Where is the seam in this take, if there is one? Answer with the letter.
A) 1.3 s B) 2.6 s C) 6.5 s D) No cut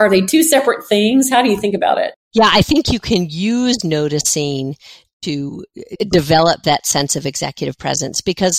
D